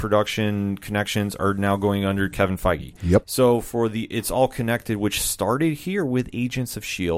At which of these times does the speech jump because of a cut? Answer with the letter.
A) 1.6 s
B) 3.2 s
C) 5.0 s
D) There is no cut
B